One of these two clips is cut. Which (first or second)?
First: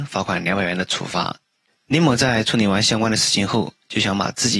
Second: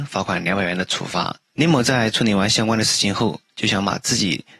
second